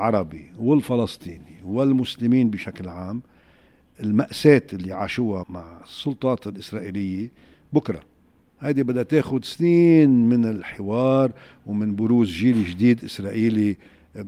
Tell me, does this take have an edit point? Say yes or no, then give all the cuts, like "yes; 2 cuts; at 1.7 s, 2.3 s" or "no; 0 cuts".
yes; 1 cut; at 5.4 s